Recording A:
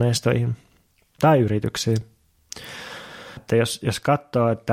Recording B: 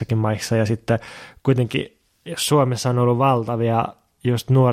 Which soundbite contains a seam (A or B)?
A